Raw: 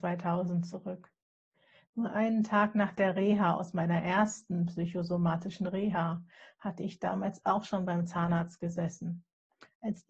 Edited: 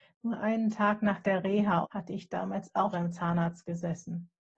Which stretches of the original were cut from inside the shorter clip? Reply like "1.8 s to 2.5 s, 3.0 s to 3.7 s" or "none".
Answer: 3.6 s to 6.5 s, 7.6 s to 7.9 s